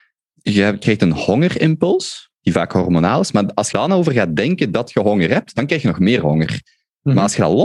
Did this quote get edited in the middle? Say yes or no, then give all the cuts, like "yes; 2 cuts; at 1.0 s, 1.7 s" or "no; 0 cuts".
yes; 1 cut; at 3.7 s